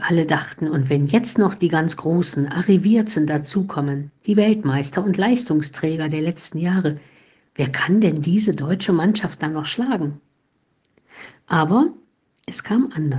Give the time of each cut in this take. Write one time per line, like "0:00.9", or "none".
none

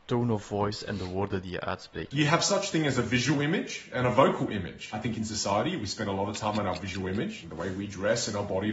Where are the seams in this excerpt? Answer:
0:02.1

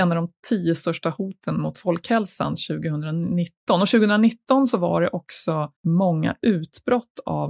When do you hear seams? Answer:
0:05.8

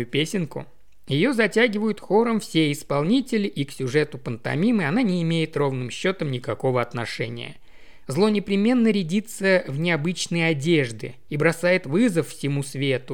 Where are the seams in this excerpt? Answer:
0:08.1
0:11.3

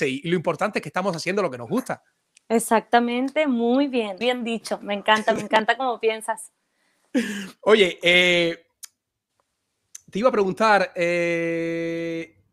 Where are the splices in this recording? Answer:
0:04.2

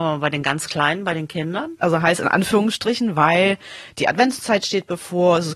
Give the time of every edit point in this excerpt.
0:01.8

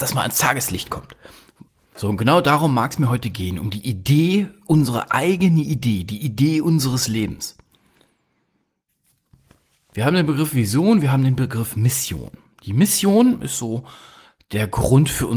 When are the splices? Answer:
none

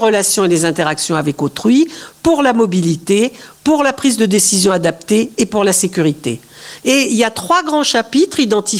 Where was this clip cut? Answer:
0:06.8

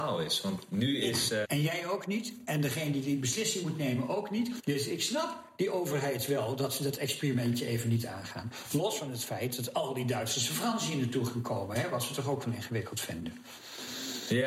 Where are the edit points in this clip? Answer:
0:01.4
0:04.6

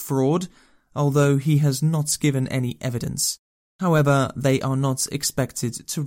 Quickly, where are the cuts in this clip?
0:03.7

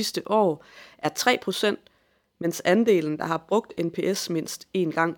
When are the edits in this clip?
none

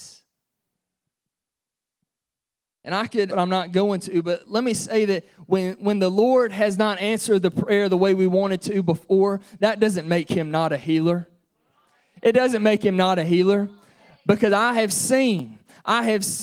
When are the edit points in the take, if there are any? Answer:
0:03.3

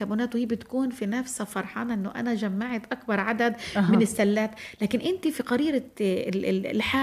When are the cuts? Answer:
none

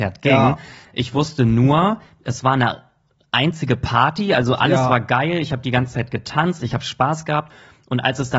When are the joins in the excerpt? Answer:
none

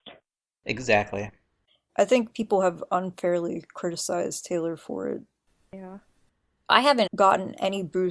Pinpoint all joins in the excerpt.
0:01.9
0:07.1

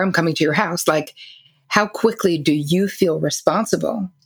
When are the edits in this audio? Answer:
none

